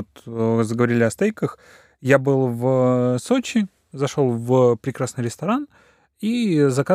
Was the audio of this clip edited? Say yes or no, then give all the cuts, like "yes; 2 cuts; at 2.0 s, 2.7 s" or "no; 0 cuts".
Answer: no; 0 cuts